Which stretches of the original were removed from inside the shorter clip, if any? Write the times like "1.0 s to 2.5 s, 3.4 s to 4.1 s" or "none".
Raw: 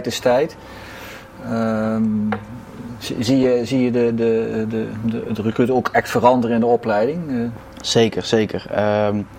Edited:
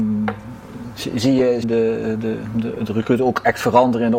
3.7 s to 4.1 s